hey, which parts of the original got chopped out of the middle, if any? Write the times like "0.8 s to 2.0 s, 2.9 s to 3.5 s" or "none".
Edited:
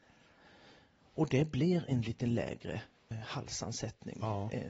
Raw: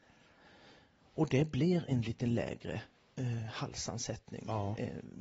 3.1 s to 3.4 s

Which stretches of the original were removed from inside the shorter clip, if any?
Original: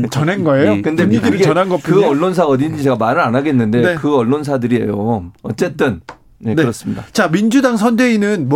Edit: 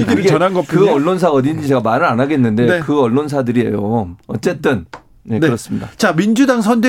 none

